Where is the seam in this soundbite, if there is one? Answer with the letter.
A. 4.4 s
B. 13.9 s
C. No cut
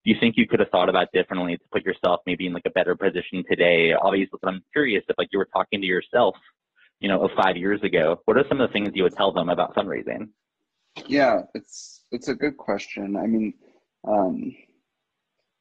A